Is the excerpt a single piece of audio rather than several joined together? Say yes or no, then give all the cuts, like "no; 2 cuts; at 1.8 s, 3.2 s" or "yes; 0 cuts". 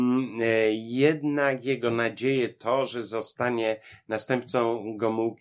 yes; 0 cuts